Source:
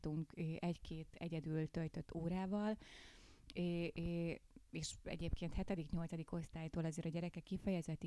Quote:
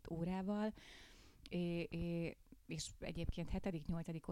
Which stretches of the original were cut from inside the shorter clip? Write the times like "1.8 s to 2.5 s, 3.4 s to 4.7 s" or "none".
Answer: none